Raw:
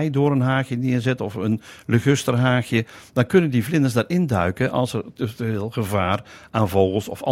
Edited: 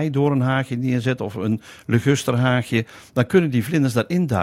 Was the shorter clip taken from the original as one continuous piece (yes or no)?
yes